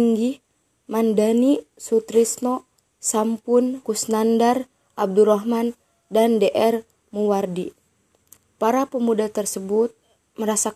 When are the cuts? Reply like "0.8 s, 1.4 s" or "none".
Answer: 3.8 s